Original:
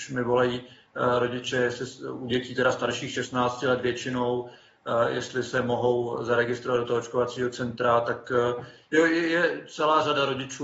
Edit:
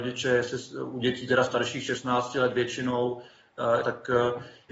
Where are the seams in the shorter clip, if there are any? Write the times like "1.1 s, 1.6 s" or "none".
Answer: 3.8 s

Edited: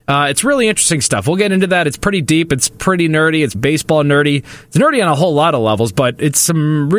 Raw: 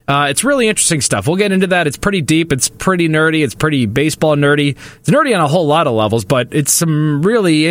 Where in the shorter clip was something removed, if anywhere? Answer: 3.5 s

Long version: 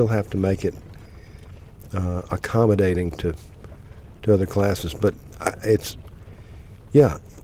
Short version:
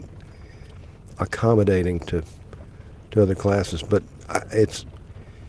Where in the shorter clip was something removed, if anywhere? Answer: 1.2 s

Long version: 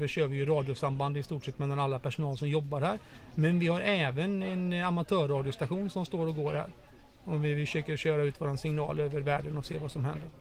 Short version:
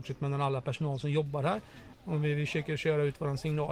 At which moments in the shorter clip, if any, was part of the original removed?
1.9 s

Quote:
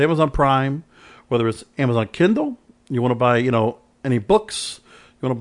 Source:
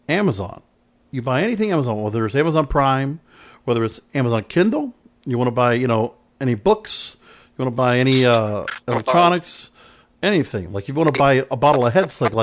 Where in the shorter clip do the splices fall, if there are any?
none

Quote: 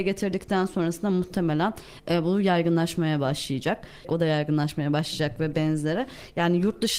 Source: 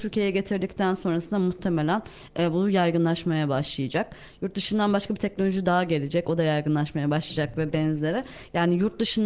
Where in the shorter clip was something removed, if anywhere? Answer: 4.0 s

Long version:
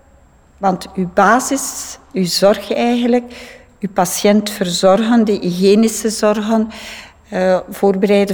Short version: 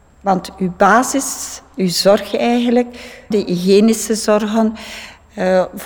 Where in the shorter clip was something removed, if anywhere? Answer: 3.3 s

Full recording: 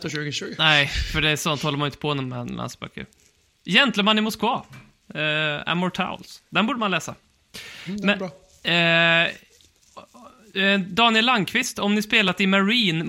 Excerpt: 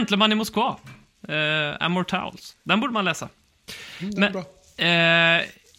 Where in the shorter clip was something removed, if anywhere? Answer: none

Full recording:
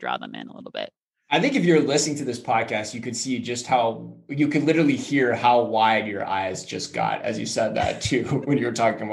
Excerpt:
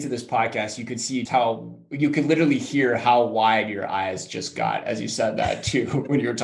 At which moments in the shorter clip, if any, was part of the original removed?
1.3 s

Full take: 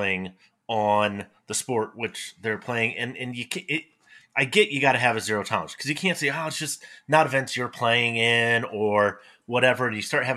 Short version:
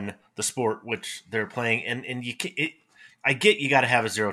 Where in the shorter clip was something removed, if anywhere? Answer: none

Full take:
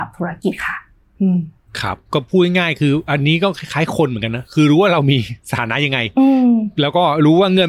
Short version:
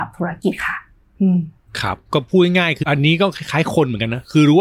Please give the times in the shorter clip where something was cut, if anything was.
2.8 s

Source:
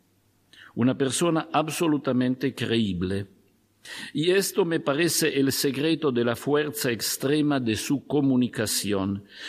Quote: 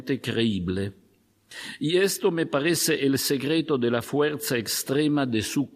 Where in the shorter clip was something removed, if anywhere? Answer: none

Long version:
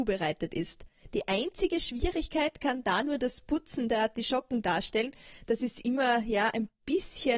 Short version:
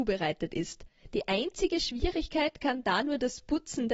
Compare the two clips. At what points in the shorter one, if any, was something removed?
none

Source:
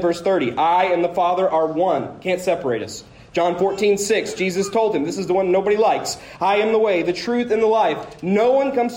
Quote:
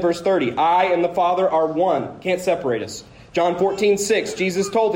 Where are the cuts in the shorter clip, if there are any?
none

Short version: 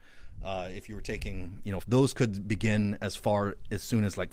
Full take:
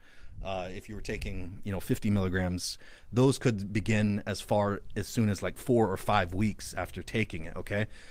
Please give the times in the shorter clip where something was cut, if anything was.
1.8 s

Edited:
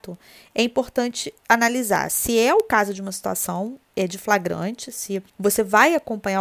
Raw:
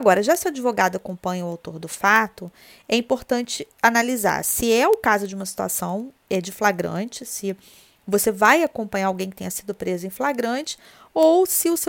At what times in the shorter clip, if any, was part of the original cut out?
5.3 s

